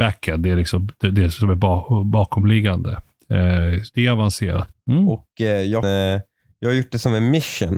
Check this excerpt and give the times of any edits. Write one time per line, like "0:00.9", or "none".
0:04.7
0:05.8